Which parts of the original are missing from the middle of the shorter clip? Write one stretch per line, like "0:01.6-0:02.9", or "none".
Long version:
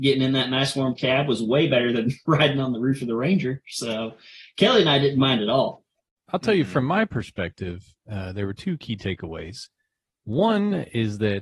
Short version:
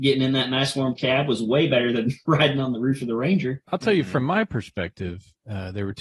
0:03.6-0:06.2